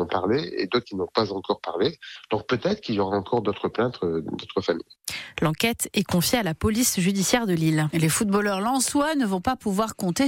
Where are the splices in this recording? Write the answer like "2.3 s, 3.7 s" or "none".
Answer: 5.4 s